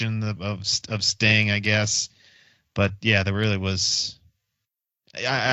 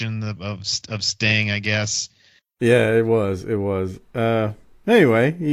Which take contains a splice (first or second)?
second